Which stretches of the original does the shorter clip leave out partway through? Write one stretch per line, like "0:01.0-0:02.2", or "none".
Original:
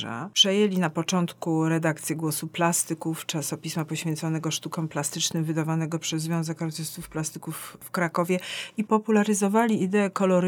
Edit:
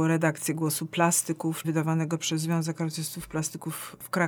0:03.3-0:05.5